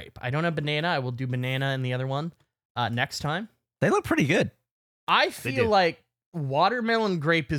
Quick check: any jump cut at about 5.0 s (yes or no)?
no